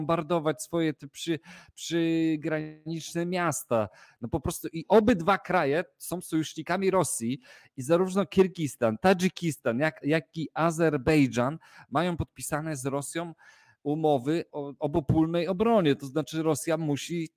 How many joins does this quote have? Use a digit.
2